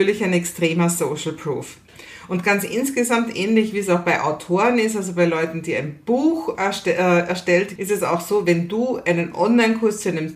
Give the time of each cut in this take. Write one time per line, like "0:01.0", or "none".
0:07.8